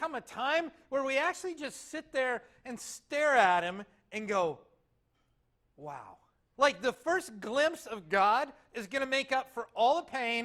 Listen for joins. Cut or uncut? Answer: cut